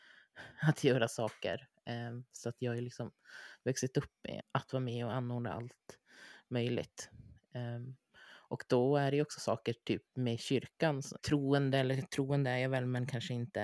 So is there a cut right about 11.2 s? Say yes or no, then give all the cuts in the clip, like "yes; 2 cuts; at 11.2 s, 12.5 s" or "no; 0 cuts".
yes; 2 cuts; at 4.4 s, 11.2 s